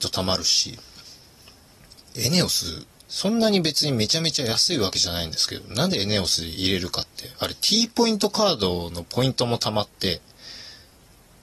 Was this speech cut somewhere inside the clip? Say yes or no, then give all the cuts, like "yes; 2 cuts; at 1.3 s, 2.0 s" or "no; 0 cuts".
yes; 1 cut; at 3.0 s